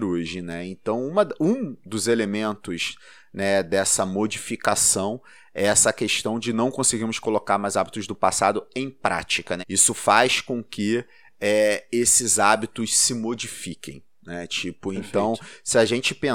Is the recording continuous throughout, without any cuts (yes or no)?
no